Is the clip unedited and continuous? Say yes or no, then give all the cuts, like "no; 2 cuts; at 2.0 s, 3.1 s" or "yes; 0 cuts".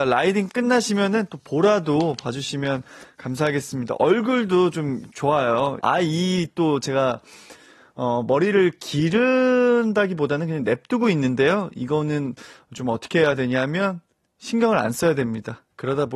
no; 1 cut; at 5.8 s